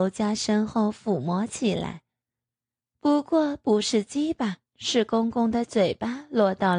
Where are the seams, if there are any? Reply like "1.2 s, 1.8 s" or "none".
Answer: 2.8 s, 4.7 s